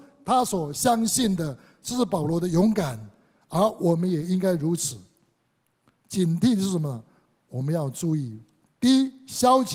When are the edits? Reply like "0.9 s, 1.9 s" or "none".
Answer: 6.0 s